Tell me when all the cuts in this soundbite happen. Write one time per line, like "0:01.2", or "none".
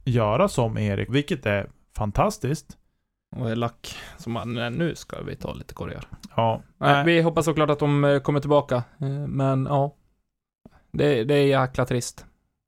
0:01.1
0:03.3